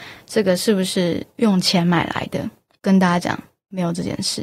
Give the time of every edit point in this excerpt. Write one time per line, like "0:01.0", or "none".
none